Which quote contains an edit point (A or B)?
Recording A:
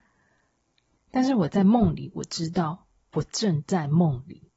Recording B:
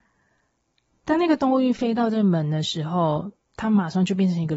A